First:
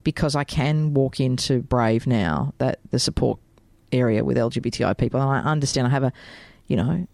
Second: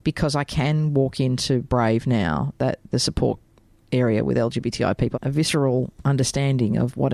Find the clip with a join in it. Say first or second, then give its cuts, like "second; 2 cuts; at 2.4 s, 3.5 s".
second; 1 cut; at 5.1 s